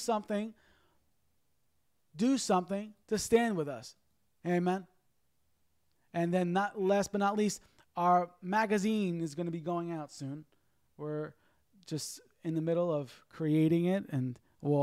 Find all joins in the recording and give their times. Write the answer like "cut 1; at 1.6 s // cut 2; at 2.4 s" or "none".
none